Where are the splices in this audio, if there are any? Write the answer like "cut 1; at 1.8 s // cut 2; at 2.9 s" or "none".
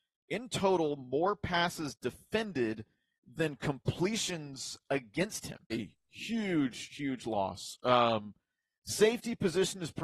cut 1; at 5.7 s